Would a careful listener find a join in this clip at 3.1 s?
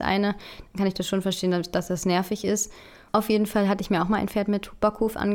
yes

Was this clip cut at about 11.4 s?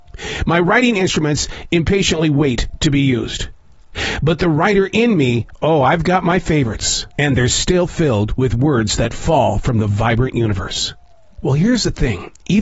yes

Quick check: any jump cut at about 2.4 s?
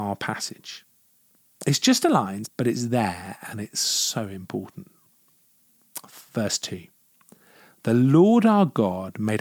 yes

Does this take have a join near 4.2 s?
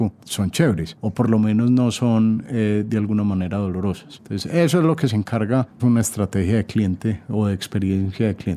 no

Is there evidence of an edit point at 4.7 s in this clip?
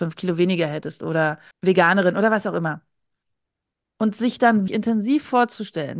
yes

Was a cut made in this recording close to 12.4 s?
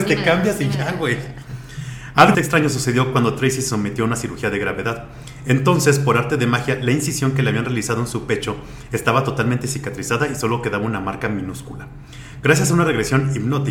no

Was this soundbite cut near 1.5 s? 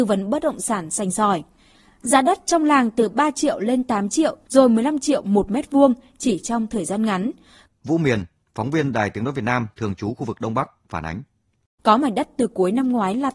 no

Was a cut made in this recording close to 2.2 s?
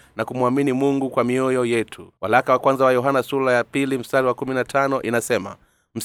yes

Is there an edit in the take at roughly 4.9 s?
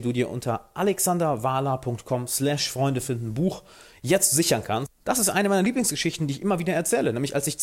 yes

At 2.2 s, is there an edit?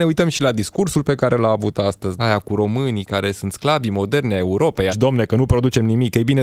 yes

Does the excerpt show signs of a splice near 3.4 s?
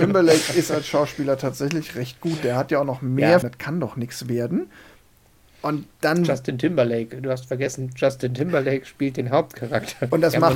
yes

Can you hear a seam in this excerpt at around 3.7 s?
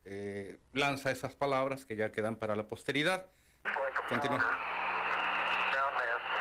yes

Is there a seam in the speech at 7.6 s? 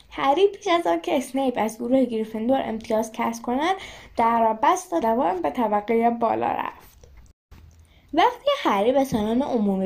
no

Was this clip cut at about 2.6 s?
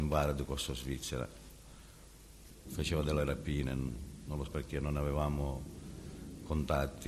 yes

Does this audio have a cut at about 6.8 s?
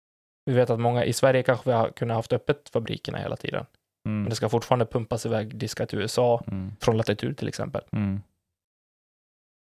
yes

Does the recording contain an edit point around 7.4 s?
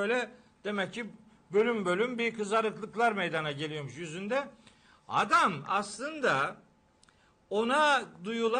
no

